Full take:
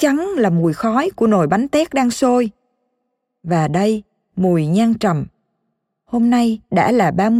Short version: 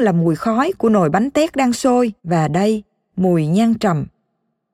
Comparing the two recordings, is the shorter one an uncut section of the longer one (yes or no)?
no